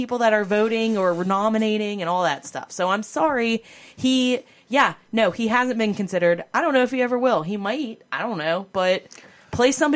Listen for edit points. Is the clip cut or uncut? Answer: uncut